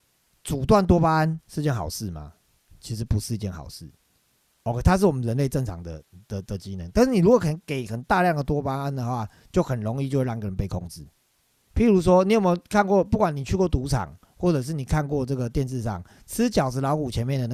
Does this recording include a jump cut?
yes; 1 cut; at 11.7 s

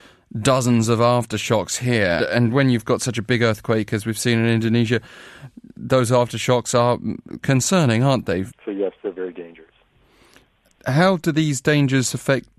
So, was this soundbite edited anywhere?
yes; 2 cuts; at 2.2 s, 8.5 s

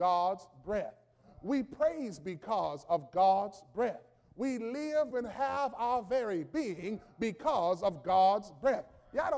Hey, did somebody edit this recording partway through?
yes; 1 cut; at 5.1 s

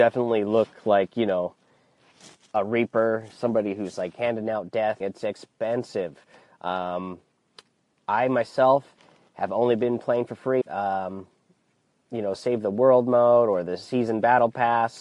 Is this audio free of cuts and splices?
no; 2 cuts; at 5.0 s, 10.6 s

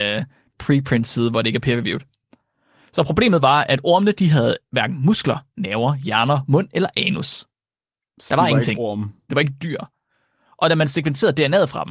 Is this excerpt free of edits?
no; 1 cut; at 9.3 s

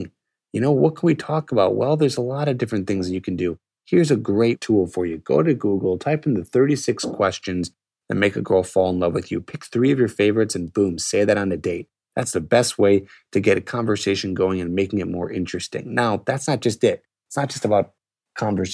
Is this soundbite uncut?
yes; 0 cuts

